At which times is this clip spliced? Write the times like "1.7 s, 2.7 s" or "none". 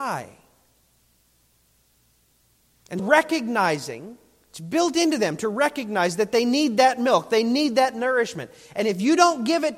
3.0 s